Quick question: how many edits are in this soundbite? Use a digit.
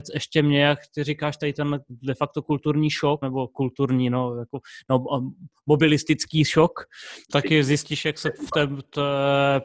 2